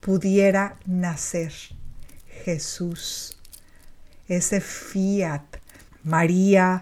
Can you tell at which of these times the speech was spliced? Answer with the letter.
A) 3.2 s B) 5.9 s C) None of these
B